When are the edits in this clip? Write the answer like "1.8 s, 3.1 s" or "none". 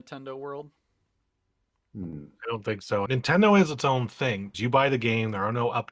3.1 s, 4.5 s

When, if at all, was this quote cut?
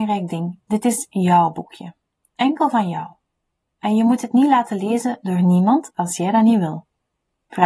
none

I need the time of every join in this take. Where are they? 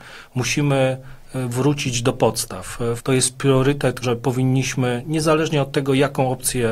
3.0 s, 4.0 s

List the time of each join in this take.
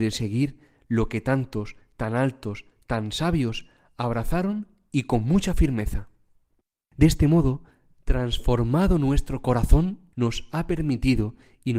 6.9 s, 10.1 s

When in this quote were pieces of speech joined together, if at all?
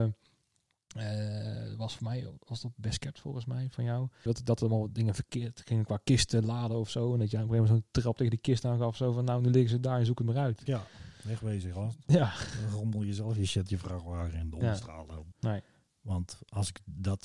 4.3 s, 15.3 s

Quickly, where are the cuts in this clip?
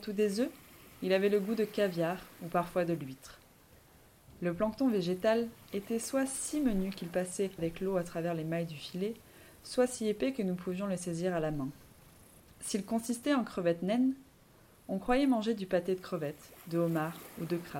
12.4 s

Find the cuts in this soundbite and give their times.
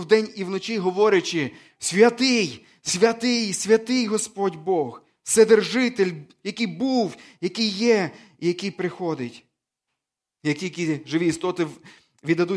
none

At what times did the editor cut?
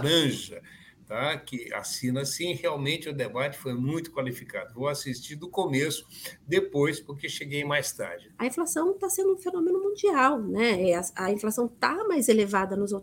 8.3 s

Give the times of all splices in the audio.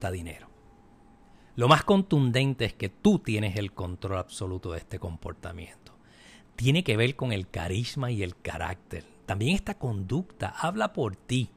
none

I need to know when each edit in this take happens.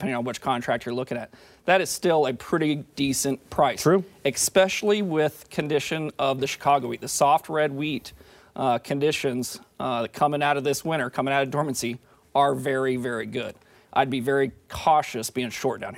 13.7 s

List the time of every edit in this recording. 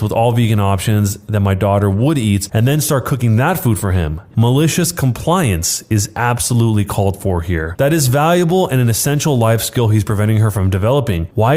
4.3 s, 7.8 s

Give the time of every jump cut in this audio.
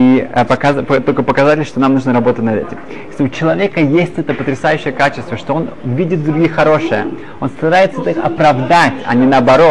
none

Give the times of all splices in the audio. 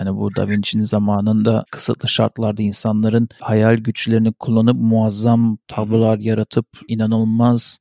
none

